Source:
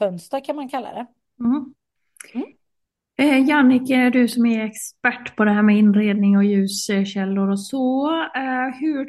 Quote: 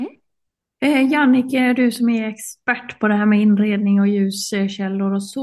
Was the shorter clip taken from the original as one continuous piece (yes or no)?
yes